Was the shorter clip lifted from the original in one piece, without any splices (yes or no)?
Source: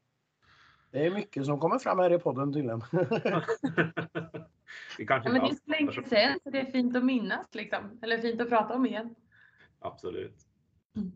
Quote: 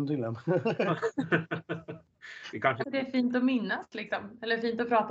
no